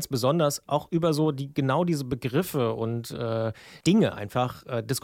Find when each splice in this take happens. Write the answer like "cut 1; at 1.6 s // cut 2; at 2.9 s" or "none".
cut 1; at 3.8 s